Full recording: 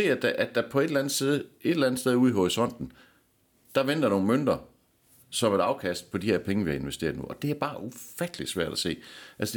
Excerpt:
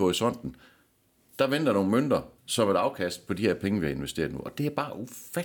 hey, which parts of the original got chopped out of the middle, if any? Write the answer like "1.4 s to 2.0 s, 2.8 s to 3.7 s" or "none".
4.7 s to 5.2 s